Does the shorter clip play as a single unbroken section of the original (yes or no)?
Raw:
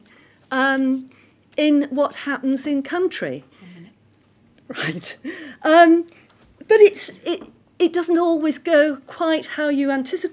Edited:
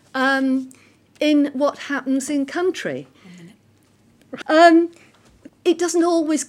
no